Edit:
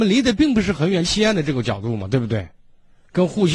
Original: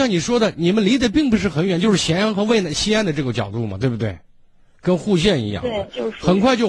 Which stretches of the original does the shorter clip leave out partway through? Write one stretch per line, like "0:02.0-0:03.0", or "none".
0:01.8-0:02.7